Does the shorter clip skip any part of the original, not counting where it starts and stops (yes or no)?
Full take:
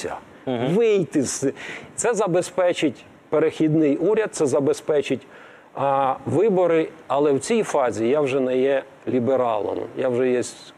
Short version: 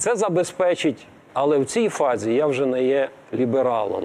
yes